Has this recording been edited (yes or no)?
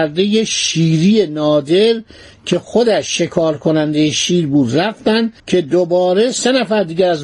yes